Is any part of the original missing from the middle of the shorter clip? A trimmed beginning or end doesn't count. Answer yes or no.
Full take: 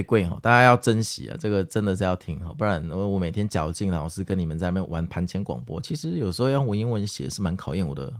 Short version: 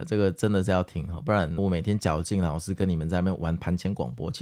yes